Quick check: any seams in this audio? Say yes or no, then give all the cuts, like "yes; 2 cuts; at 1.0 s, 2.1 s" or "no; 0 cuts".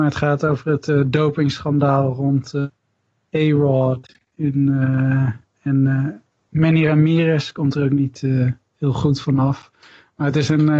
no; 0 cuts